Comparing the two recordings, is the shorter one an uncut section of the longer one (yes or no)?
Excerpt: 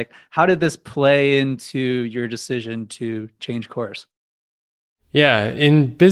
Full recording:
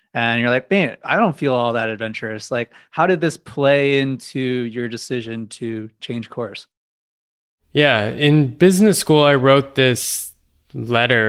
yes